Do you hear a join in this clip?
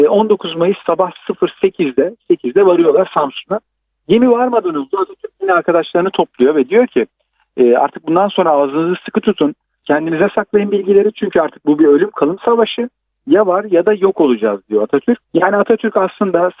yes; 2 cuts; at 9.8 s, 15.2 s

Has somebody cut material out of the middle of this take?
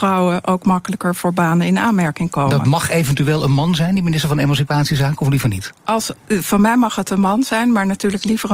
no; 0 cuts

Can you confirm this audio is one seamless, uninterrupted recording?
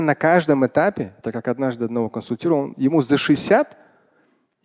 yes; 0 cuts

